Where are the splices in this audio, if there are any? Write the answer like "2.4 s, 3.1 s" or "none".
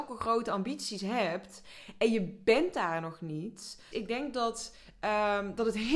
3.9 s